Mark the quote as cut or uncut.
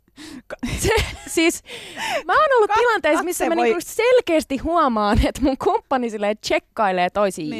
uncut